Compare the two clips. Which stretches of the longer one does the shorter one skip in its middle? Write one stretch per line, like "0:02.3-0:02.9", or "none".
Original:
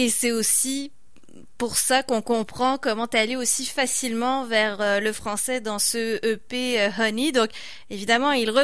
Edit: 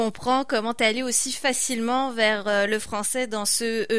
none